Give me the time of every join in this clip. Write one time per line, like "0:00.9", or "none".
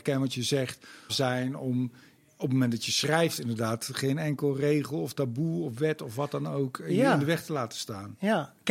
0:01.1